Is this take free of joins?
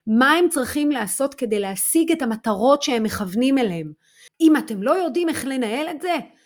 no; 1 cut; at 4.3 s

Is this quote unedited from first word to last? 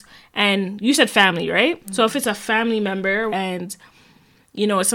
no; 1 cut; at 3.3 s

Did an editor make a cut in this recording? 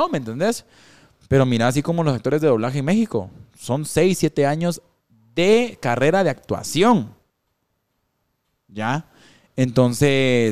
no; 0 cuts

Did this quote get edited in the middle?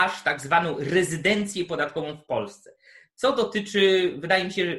no; 0 cuts

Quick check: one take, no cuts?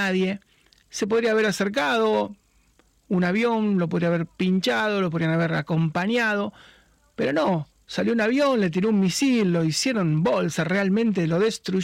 yes; 0 cuts

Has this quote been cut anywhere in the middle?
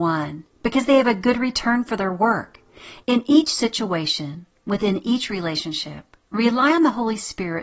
yes; 1 cut; at 3.0 s

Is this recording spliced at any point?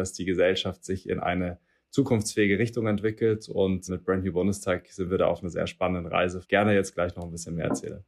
yes; 2 cuts; at 3.9 s, 6.4 s

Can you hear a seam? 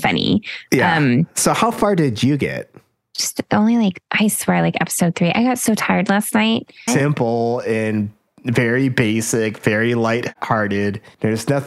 yes; 1 cut; at 6.9 s

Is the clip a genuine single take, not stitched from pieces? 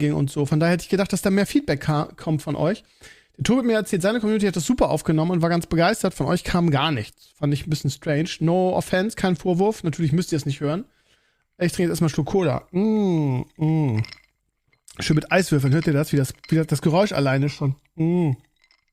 yes; 0 cuts

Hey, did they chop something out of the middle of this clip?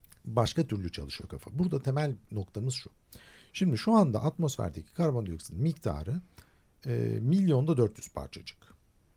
no; 0 cuts

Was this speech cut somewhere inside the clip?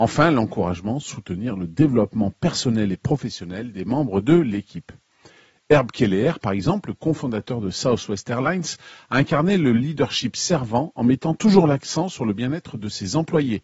no; 0 cuts

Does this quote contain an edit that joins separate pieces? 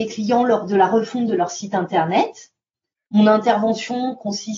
no; 0 cuts

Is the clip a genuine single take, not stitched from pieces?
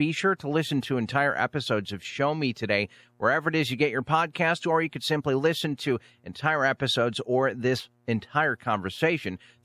yes; 0 cuts

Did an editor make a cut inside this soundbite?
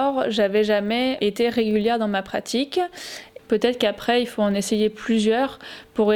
yes; 2 cuts; at 1.2 s, 3.4 s

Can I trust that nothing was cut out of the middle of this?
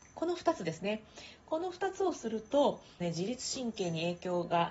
no; 1 cut; at 3.0 s

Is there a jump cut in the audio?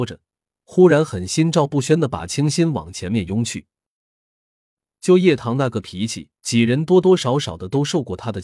yes; 2 cuts; at 4.9 s, 6.4 s

